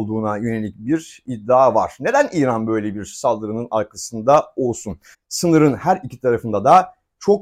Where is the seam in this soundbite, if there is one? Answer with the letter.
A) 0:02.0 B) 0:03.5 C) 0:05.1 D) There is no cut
C